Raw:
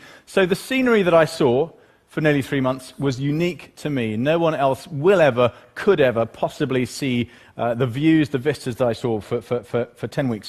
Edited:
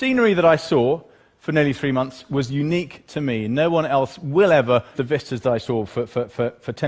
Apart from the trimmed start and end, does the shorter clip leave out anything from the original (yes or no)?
yes